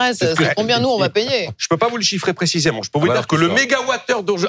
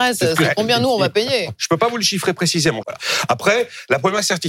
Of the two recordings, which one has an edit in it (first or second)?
second